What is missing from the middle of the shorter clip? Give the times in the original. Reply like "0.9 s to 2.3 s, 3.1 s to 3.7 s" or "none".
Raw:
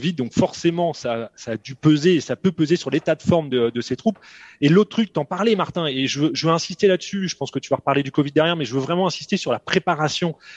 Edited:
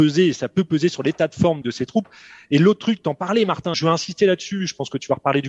3.5 s to 3.7 s, 5.8 s to 6.4 s